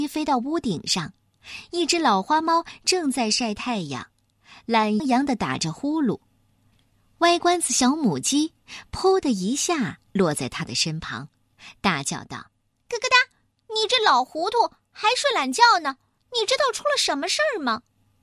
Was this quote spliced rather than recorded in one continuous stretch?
yes; 1 cut; at 5.0 s

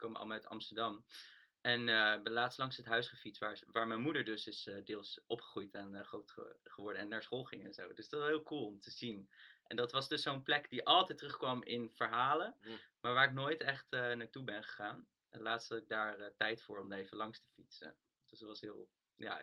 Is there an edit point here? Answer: no; 0 cuts

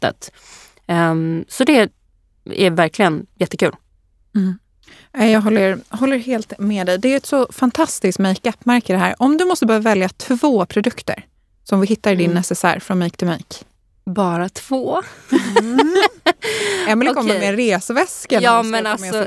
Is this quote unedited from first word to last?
yes; 0 cuts

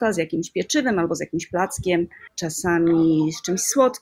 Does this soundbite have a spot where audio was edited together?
yes; 1 cut; at 2.3 s

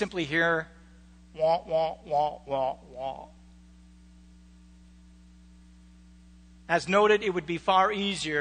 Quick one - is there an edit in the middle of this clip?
no; 0 cuts

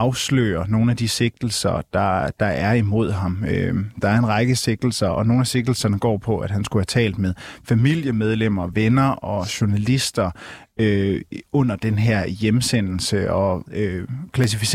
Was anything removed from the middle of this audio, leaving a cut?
yes; 1 cut; at 13.7 s

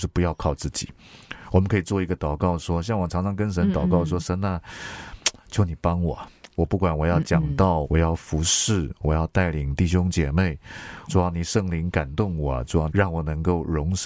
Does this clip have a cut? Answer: yes; 3 cuts; at 7.8 s, 11.1 s, 12.9 s

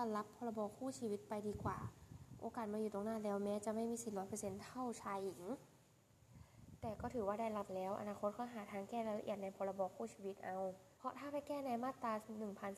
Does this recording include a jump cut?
yes; 1 cut; at 11.0 s

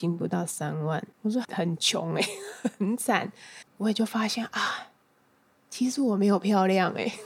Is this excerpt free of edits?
no; 1 cut; at 3.7 s

